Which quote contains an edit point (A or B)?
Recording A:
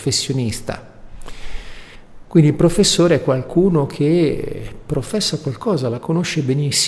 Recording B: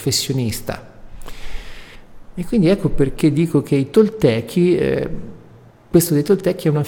B